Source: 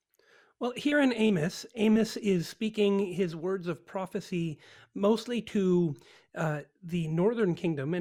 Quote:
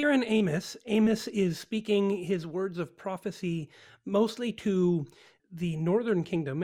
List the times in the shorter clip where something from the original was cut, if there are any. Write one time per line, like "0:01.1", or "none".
0:05.4